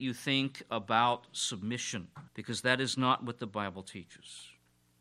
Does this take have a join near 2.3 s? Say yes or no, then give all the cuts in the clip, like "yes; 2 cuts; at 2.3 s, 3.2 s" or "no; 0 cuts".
yes; 1 cut; at 2.3 s